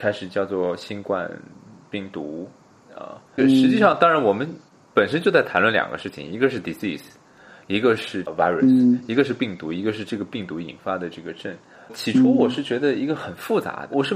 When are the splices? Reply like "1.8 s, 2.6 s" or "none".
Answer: 11.7 s